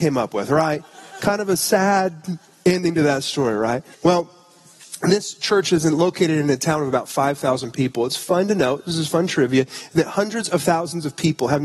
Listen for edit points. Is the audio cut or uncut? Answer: cut